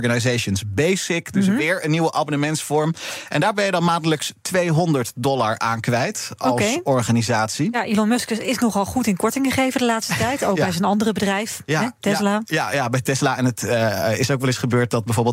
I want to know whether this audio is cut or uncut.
uncut